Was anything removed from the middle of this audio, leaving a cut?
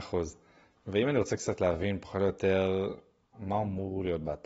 yes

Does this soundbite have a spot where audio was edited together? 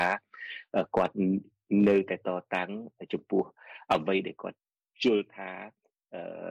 no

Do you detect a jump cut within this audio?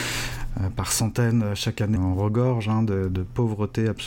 yes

